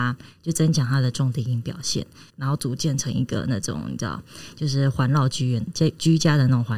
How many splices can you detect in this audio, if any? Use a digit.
1